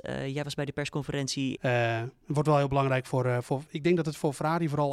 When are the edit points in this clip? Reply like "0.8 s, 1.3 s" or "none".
1.6 s